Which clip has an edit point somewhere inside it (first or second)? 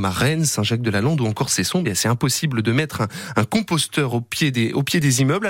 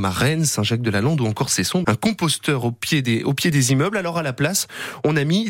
second